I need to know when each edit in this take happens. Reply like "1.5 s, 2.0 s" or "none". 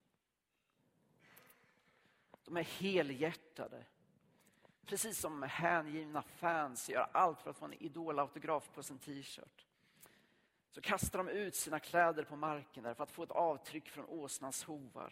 none